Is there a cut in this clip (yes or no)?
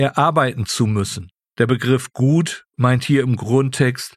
yes